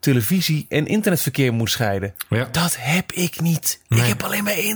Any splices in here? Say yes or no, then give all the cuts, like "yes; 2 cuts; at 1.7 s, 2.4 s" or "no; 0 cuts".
no; 0 cuts